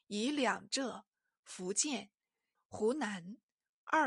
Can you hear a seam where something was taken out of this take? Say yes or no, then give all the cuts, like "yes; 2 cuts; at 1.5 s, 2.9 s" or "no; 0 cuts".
yes; 1 cut; at 2.6 s